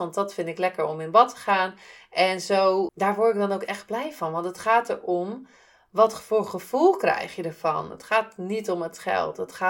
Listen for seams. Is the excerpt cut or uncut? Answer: cut